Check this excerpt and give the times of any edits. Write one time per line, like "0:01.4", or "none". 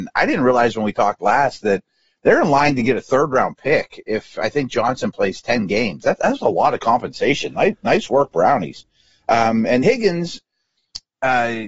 0:09.8